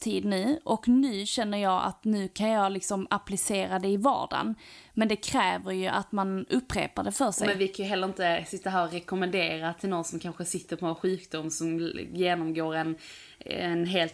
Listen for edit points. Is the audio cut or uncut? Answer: uncut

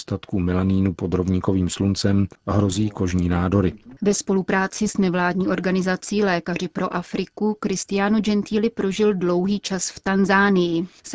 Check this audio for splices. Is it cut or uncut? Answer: cut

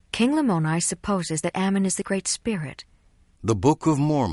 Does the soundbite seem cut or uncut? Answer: cut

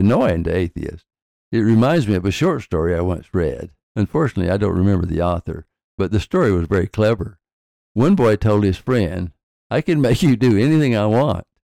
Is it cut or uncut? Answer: uncut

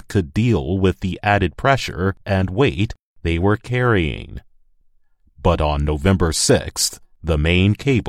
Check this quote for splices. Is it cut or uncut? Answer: uncut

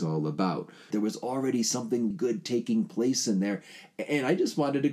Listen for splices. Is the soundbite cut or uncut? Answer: cut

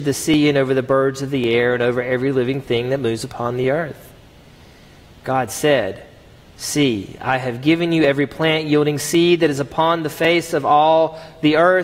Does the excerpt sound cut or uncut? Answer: uncut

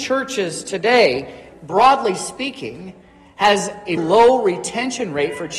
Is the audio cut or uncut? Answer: cut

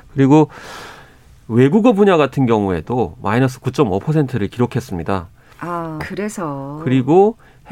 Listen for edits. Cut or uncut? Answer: cut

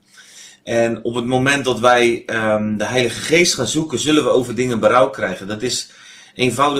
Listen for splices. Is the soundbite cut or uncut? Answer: uncut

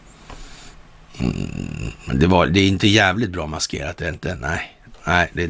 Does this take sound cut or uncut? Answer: uncut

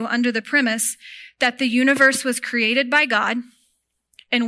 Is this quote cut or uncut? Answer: uncut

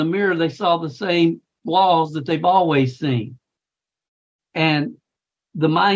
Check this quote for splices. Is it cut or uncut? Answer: uncut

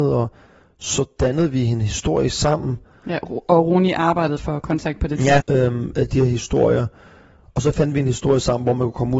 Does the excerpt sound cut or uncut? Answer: cut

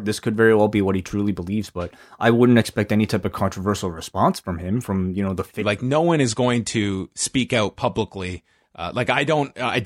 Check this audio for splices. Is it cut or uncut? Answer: cut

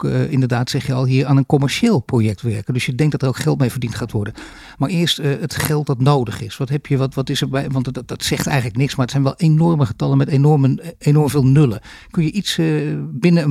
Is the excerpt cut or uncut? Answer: uncut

